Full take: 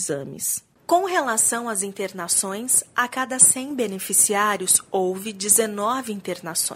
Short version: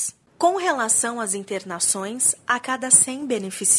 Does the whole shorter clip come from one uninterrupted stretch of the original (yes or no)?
yes